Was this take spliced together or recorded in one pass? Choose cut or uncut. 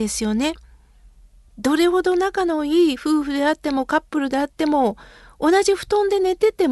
uncut